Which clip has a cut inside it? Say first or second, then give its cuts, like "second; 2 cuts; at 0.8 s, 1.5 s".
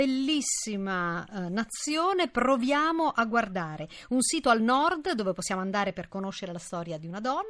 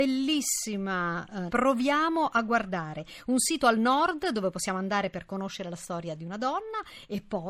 second; 1 cut; at 1.5 s